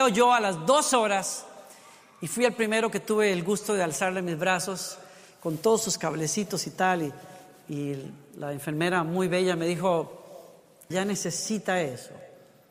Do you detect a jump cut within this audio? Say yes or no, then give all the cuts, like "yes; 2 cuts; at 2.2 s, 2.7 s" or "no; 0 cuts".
yes; 1 cut; at 10.9 s